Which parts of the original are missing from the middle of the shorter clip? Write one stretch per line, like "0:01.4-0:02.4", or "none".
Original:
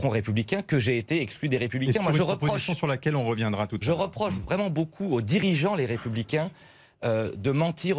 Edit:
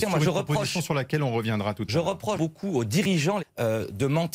0:04.3-0:04.7
0:05.8-0:06.8

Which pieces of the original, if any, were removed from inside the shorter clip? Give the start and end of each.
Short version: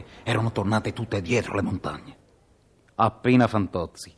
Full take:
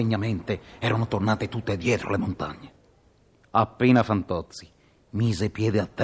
none

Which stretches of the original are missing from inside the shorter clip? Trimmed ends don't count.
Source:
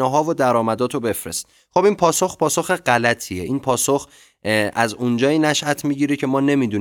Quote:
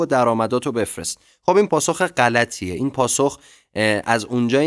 0:02.0-0:02.4

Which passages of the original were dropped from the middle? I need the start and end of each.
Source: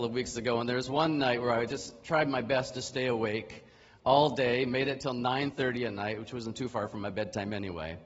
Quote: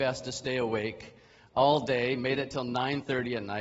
none

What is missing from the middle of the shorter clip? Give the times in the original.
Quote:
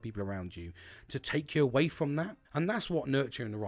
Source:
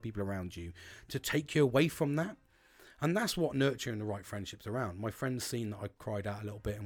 0:02.4-0:02.9

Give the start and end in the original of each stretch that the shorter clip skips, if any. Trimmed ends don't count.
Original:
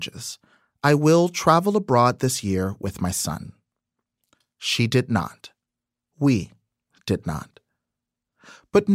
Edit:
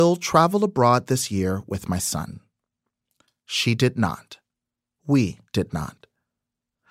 0:06.6-0:07.0

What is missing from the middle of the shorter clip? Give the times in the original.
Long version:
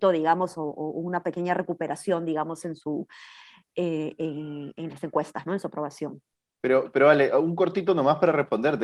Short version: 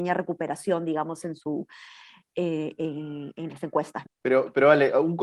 0:05.5-0:06.4

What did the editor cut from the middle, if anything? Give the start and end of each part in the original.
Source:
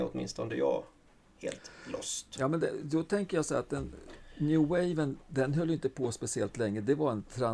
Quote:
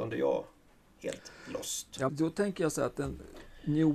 0:02.5-0:02.8

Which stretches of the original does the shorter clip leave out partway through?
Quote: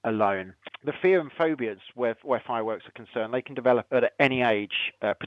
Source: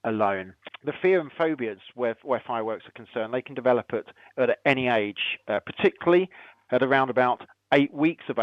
0:03.9-0:04.3

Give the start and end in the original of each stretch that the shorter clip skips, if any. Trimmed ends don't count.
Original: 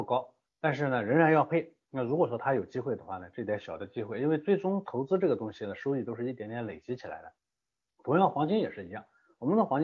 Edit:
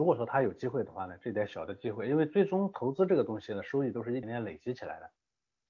0:06.4-0:06.5

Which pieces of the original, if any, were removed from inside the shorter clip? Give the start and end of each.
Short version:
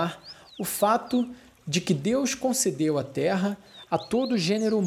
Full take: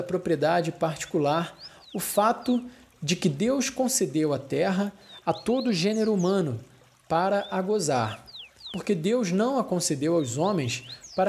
none

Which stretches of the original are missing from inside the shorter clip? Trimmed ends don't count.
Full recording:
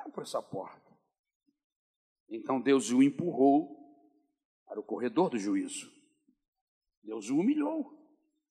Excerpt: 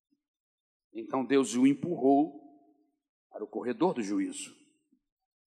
none

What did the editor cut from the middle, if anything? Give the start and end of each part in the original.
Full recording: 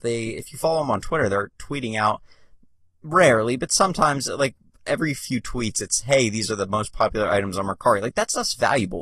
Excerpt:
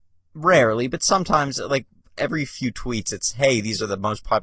none

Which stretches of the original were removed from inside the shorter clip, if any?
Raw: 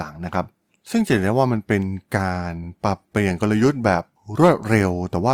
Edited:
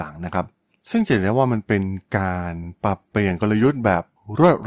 none

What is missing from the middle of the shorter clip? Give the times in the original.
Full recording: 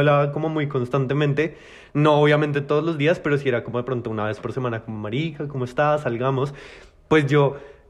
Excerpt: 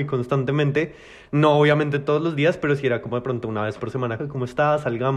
0:04.8-0:05.4

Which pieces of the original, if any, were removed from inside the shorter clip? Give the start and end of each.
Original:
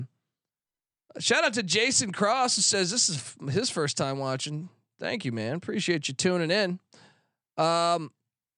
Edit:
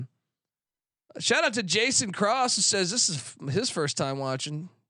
none

